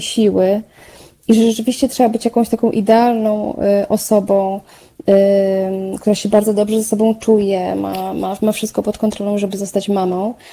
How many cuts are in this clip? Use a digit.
0